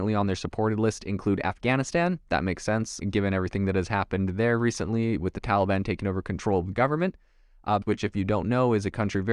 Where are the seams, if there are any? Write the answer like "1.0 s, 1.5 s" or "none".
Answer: 3.0 s, 7.8 s